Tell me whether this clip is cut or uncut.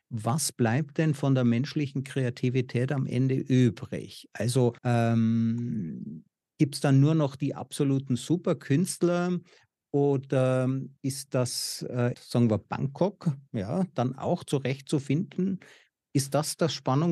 cut